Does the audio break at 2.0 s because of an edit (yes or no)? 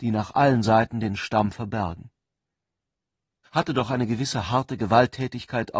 no